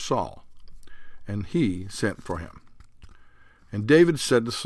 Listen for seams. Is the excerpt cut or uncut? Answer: uncut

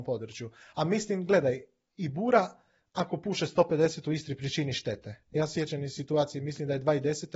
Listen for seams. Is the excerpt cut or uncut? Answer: uncut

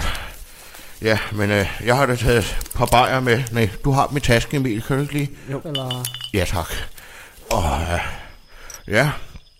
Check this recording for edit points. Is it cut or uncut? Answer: cut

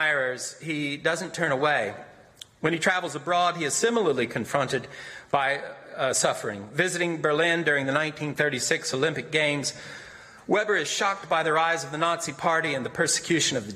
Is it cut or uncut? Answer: uncut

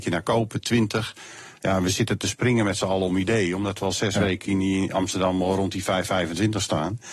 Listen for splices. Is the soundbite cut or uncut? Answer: uncut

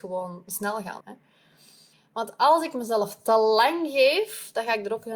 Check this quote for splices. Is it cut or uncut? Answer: cut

